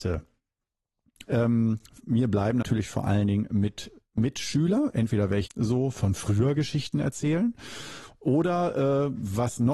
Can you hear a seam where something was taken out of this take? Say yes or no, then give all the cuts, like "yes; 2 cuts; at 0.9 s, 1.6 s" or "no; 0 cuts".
yes; 3 cuts; at 1.2 s, 2.6 s, 5.5 s